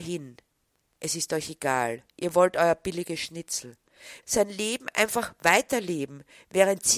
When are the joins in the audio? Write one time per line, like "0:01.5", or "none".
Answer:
0:02.1
0:04.2